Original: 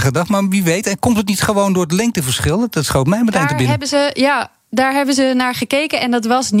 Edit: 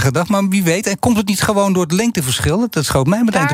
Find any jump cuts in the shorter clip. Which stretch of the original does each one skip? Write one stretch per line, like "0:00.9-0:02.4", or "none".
none